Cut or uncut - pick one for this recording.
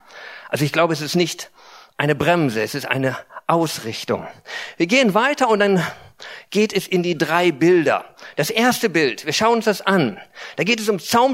uncut